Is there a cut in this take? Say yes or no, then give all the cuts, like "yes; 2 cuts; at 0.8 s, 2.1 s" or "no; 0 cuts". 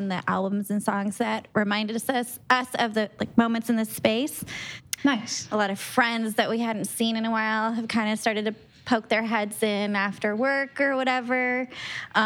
yes; 1 cut; at 5.0 s